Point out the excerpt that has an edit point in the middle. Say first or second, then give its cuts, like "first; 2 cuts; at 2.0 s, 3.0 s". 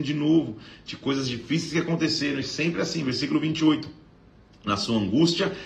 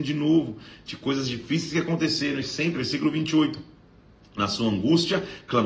second; 1 cut; at 2.8 s